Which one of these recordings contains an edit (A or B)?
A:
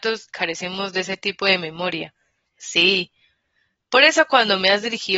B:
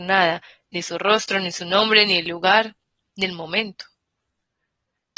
A